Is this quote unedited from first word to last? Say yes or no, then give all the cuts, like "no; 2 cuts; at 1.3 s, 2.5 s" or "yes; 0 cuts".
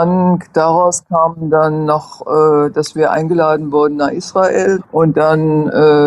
no; 1 cut; at 4.8 s